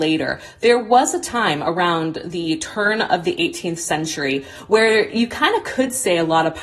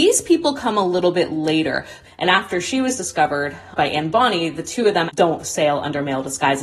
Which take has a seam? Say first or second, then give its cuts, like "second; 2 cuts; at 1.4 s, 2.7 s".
second; 2 cuts; at 2.0 s, 5.1 s